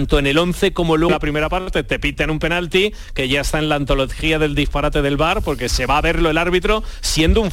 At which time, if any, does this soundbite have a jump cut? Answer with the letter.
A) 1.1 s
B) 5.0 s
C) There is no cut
A